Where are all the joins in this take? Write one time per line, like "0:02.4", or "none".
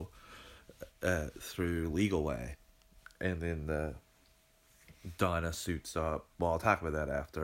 none

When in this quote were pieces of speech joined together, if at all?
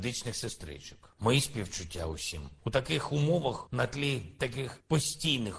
0:01.2
0:02.6

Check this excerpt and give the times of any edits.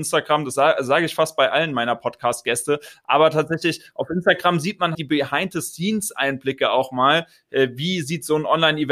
0:04.9

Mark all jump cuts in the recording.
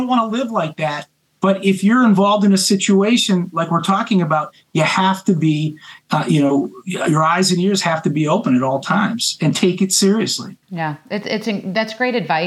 0:04.6
0:10.6

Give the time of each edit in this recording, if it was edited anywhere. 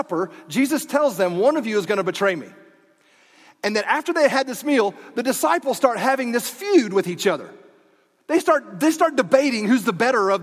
none

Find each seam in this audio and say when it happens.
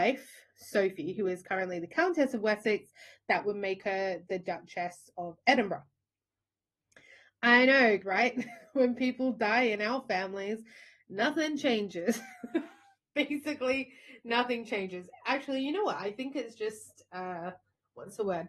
0:08.0

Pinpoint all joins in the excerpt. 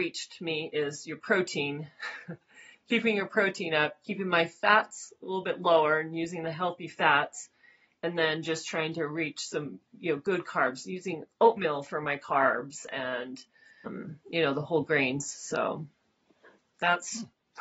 none

